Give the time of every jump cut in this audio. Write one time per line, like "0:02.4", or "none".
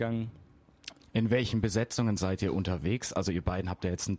0:01.0